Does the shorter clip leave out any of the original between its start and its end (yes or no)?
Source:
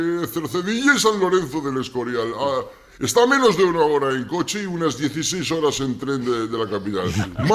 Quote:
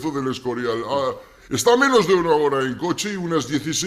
no